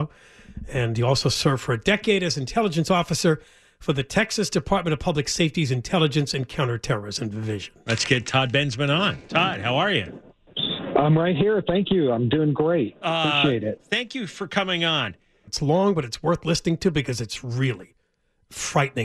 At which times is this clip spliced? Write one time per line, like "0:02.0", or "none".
0:15.5